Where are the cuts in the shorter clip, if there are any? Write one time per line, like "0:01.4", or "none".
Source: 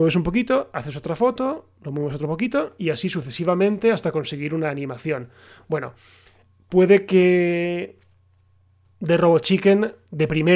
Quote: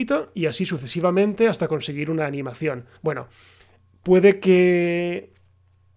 0:03.0